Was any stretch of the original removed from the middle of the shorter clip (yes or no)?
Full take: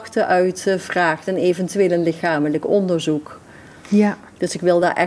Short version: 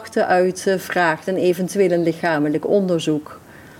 no